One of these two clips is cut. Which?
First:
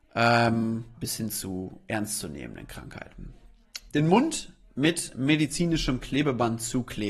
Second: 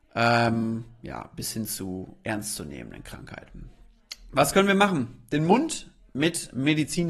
first; 2 cuts; at 0.9 s, 3.9 s

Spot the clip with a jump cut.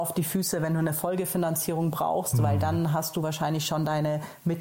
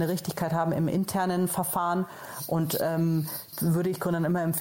second; 1 cut; at 3.5 s

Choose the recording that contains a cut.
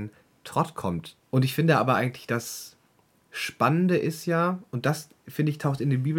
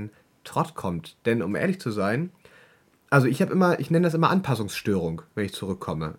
first; 1 cut; at 1.2 s

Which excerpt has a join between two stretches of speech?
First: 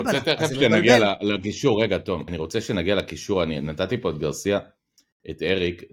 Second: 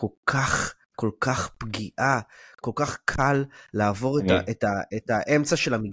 first; 1 cut; at 2.3 s

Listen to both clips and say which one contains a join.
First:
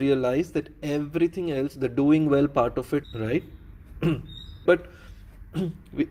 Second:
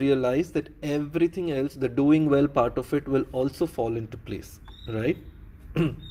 first; 2 cuts; at 3.0 s, 4.7 s

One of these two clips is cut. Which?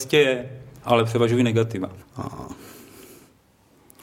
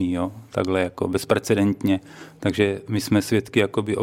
first; 1 cut; at 2.0 s

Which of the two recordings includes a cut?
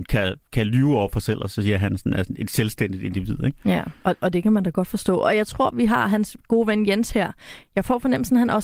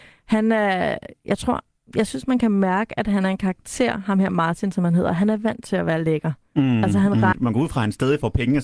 second; 1 cut; at 7.3 s

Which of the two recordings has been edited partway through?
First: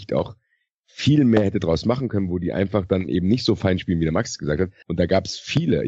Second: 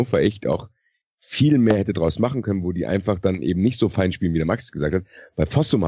first; 1 cut; at 4.8 s

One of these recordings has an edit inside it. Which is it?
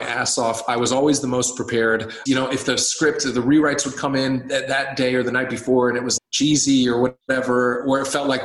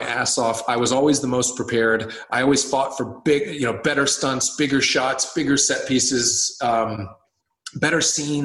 first; 2 cuts; at 2.3 s, 6.2 s

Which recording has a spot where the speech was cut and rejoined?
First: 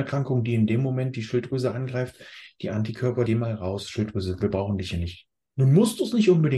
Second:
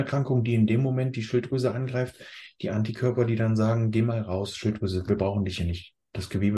first; 2 cuts; at 3.3 s, 5.4 s

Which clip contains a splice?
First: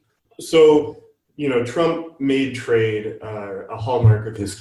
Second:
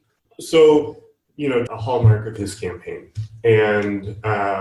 second; 1 cut; at 1.7 s

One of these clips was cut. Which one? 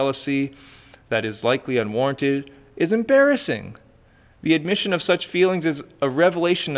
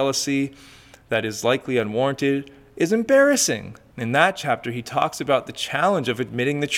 second; 1 cut; at 3.9 s

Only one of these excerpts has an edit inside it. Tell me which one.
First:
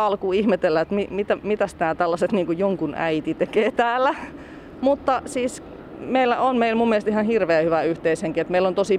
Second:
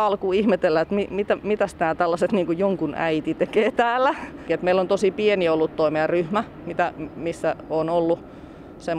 second; 1 cut; at 4.5 s

